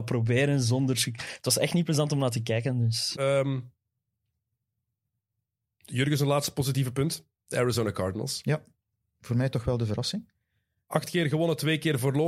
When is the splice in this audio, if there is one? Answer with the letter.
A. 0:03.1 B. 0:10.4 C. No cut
A